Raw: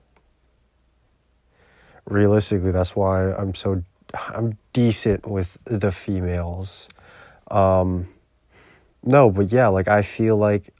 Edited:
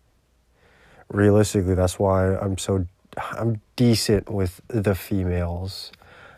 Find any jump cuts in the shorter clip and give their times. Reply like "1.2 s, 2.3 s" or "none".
none